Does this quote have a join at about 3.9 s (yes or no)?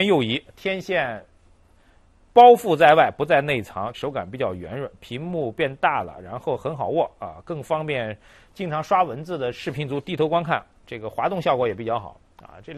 yes